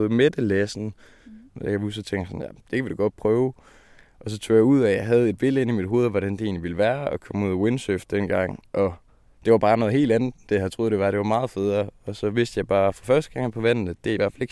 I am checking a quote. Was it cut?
yes; 1 cut; at 1.5 s

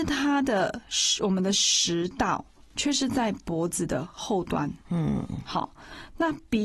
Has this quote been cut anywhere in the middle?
yes; 1 cut; at 4.8 s

